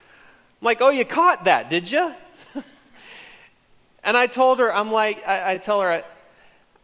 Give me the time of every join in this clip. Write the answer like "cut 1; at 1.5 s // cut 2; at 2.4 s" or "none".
none